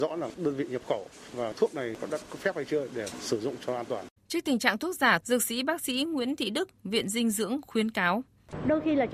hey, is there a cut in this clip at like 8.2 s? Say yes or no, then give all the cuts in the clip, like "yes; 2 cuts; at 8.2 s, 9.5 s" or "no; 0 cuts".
no; 2 cuts; at 4.2 s, 5.2 s